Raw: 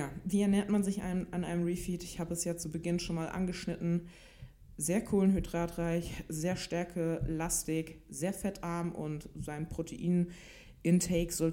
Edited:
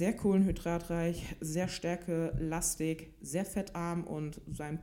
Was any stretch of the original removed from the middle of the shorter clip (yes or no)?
no